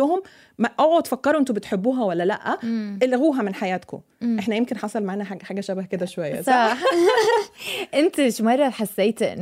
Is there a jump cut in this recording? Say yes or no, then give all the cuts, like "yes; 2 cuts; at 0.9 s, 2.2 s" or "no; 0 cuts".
no; 0 cuts